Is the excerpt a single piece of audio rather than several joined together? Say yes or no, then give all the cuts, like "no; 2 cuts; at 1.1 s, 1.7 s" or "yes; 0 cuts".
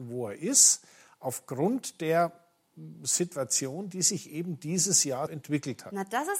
no; 1 cut; at 5.3 s